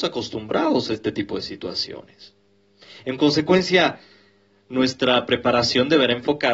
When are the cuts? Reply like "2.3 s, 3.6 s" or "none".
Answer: none

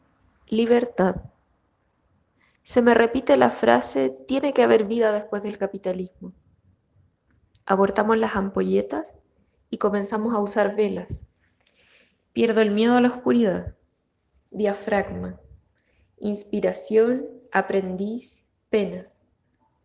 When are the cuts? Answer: none

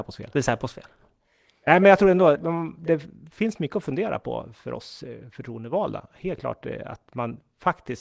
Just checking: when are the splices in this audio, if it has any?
2.3 s

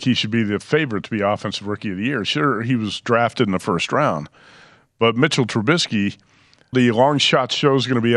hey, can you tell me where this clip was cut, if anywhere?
6.7 s

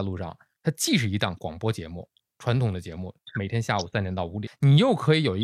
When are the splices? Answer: 4.5 s

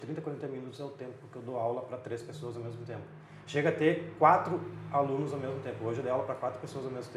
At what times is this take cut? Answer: none

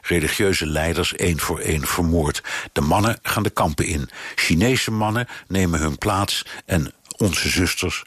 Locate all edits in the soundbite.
none

